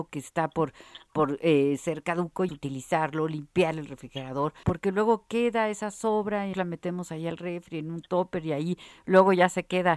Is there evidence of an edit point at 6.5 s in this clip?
yes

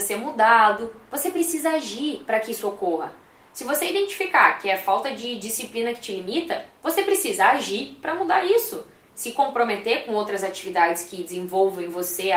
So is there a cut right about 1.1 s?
no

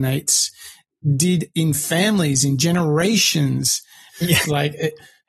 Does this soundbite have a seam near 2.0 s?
no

